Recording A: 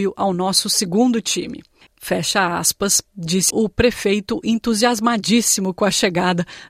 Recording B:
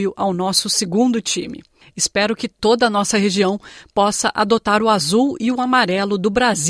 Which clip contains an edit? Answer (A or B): A